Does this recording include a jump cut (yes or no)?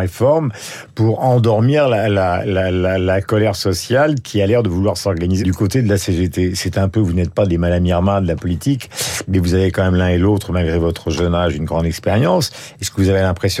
yes